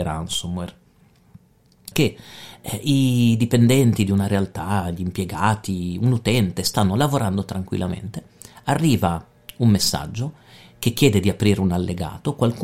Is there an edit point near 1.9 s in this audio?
yes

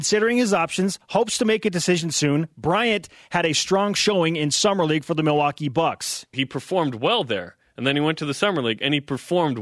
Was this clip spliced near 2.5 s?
no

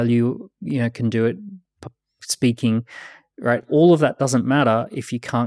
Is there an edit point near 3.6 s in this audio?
no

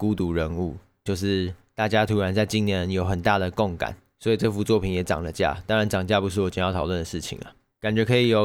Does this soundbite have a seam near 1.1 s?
yes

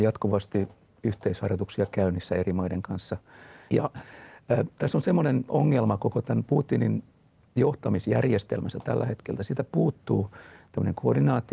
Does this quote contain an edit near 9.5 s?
no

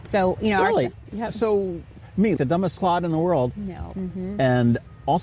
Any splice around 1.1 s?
no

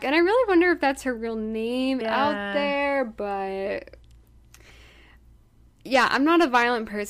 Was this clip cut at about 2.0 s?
yes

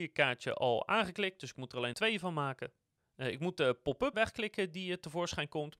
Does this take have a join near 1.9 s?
yes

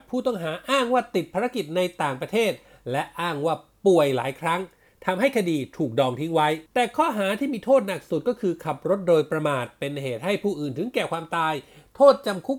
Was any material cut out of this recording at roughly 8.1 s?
no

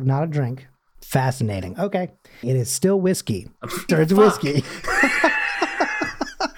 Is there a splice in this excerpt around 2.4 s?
yes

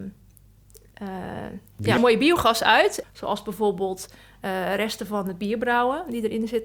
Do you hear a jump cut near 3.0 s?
yes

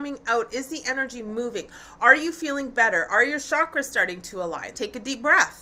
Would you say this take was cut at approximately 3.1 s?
no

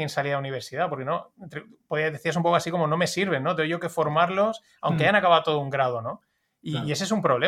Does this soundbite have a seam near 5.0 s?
no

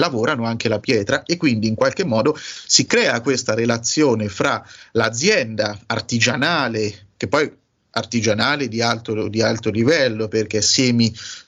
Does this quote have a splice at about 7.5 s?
no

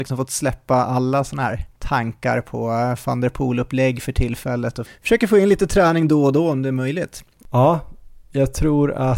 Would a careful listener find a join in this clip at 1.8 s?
yes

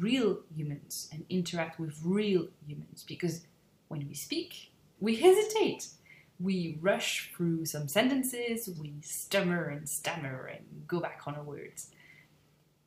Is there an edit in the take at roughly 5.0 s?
yes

